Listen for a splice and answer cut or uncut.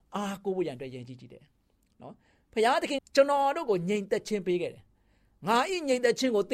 cut